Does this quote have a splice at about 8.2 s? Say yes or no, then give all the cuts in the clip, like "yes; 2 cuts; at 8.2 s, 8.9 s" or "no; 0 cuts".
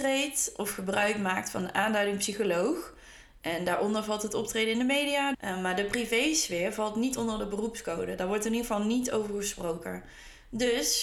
no; 1 cut; at 5.3 s